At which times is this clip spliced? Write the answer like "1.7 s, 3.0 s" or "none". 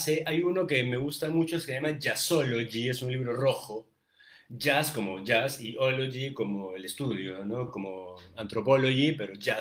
none